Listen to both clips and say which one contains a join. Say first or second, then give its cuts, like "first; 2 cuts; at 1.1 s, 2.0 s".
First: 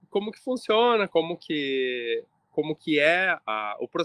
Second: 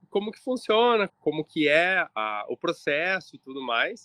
second; 1 cut; at 1.1 s